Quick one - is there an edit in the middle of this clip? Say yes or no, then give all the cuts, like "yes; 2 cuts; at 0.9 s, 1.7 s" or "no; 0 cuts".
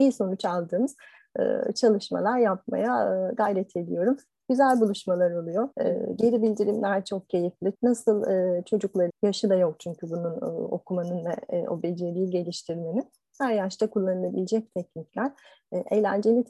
yes; 3 cuts; at 5.7 s, 7.7 s, 9.1 s